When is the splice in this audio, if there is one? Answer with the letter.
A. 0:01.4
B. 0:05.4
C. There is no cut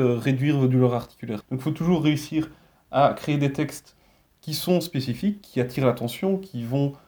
A